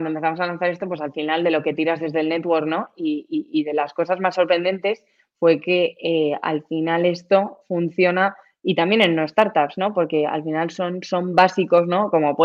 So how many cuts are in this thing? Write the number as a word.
zero